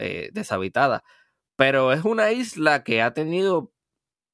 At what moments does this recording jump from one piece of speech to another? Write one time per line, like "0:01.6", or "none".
none